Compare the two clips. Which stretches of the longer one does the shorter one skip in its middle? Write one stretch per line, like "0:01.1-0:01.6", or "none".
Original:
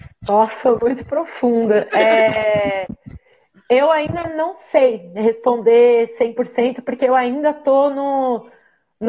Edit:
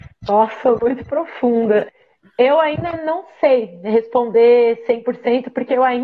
0:01.9-0:03.2